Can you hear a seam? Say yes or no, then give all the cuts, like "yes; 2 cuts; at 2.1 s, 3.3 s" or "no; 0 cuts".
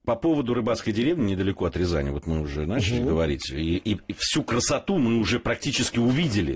no; 0 cuts